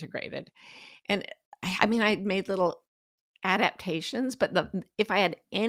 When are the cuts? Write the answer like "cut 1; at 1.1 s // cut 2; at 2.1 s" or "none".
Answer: none